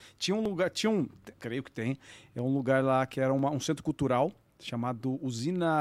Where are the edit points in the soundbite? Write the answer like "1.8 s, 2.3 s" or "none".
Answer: 1.4 s